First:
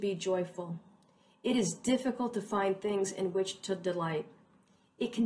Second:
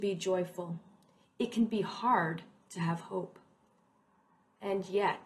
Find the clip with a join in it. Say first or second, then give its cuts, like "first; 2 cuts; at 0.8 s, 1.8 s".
second; 1 cut; at 1.2 s